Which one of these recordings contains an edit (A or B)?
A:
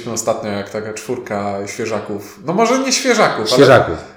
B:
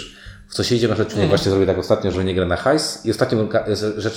B